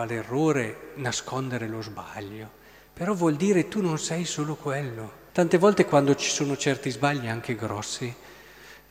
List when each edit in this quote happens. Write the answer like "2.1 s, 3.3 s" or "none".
5.3 s

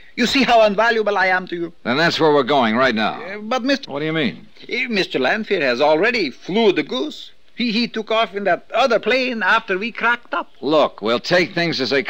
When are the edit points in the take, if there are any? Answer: 3.8 s

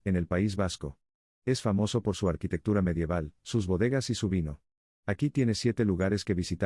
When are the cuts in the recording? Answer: none

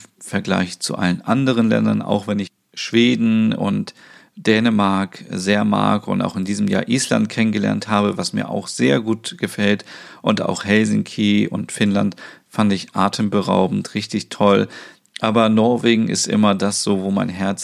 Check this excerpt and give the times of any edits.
none

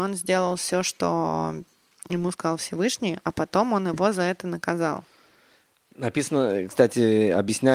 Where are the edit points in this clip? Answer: none

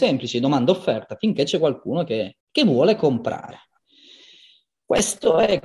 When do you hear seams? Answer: 2.4 s

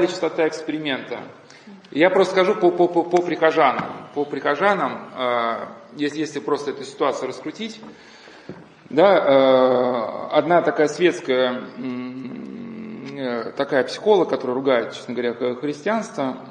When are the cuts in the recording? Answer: none

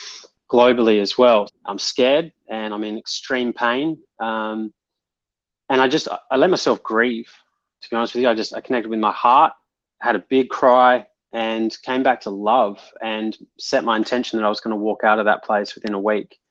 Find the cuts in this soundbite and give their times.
1.5 s

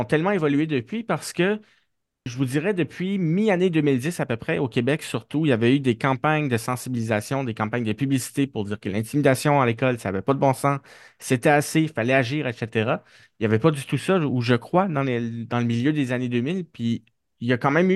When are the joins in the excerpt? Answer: 2.3 s

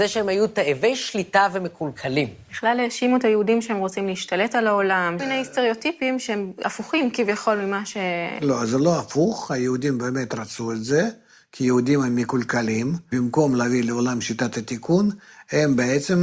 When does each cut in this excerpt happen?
none

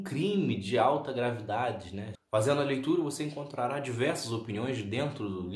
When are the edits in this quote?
2.2 s

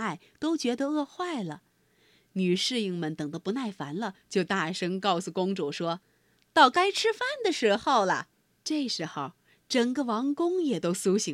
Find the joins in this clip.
8.6 s

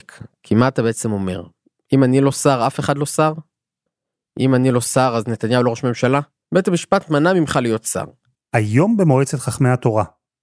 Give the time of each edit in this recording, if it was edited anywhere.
6.4 s, 8.3 s

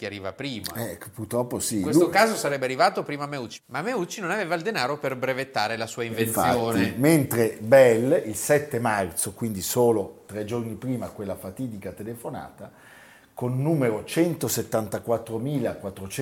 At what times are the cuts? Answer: none

